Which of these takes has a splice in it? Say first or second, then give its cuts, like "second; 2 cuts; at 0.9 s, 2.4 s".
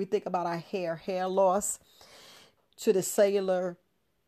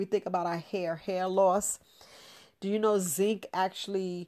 first; 1 cut; at 2.6 s